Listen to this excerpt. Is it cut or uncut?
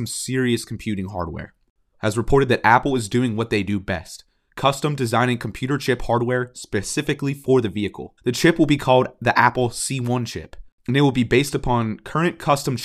cut